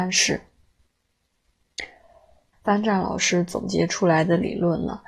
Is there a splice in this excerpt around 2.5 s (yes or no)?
yes